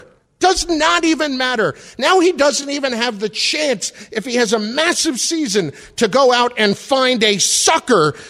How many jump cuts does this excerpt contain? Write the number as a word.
zero